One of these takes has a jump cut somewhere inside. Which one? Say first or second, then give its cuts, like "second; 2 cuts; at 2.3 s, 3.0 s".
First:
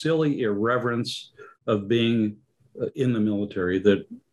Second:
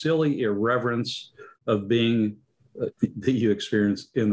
second; 1 cut; at 2.9 s